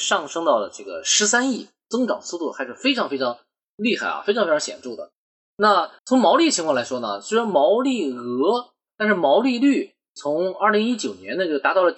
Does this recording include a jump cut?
yes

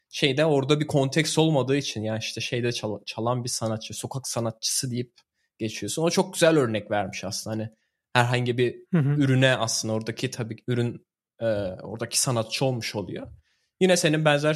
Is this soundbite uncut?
yes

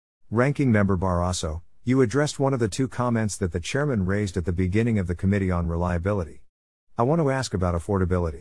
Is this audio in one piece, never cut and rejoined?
yes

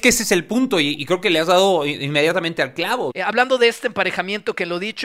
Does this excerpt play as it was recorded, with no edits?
no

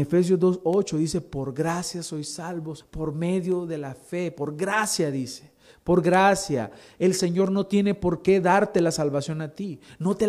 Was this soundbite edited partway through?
yes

